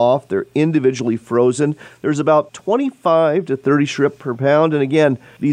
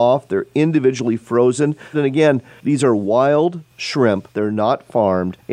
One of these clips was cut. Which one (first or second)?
second